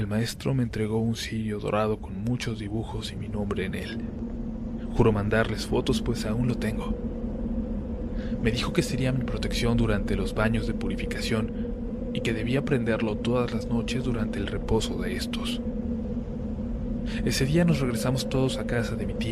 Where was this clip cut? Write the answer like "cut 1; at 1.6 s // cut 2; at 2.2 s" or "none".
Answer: none